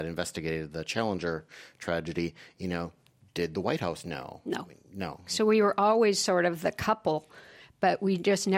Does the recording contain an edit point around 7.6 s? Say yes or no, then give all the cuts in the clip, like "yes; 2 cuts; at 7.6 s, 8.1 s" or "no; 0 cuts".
no; 1 cut; at 5.3 s